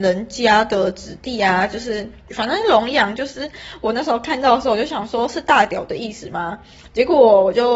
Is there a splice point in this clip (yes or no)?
yes